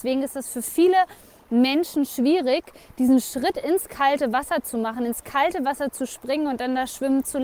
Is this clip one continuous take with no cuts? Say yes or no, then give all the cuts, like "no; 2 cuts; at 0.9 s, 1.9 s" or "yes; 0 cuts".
yes; 0 cuts